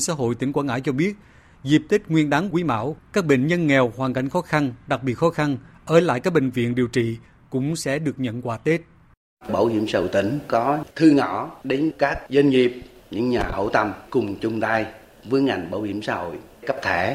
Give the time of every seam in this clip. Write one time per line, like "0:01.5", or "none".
none

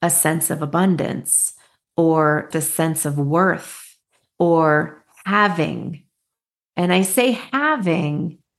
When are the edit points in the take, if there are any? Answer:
0:02.5

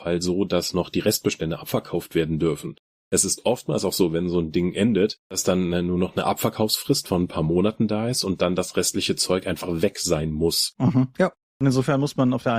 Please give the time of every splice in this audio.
0:11.1

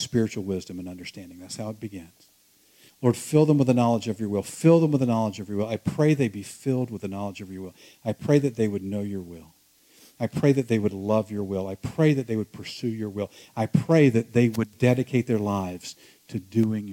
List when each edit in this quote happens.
none

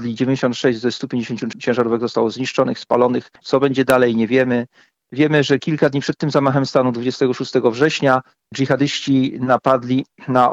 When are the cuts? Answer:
0:03.4

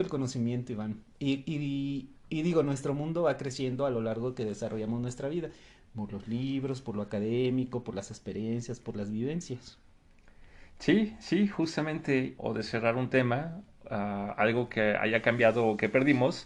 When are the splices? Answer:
0:12.4

